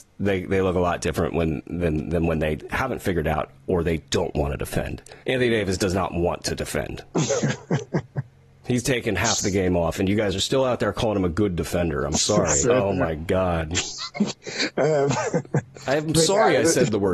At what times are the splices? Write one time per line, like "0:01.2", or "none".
0:05.2
0:12.6